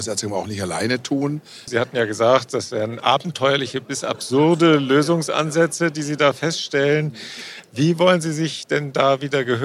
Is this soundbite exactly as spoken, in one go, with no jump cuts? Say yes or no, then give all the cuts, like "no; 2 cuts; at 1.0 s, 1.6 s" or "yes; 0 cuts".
no; 1 cut; at 1.7 s